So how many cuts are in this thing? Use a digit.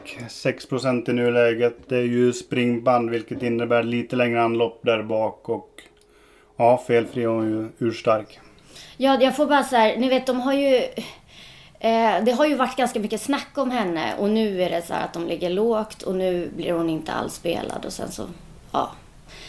0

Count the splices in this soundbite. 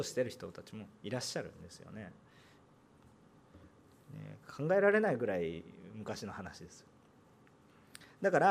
0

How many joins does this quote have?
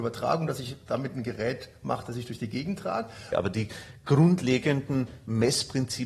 1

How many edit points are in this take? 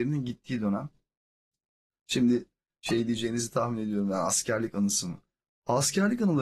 0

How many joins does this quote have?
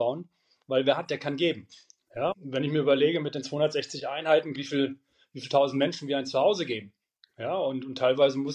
2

